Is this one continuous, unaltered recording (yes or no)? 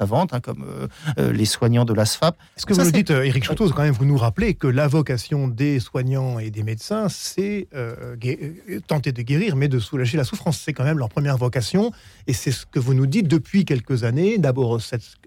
no